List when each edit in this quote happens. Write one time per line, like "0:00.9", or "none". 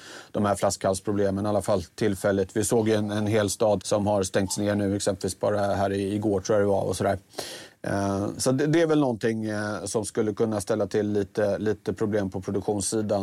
0:03.8